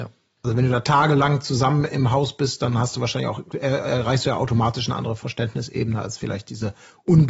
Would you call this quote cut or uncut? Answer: uncut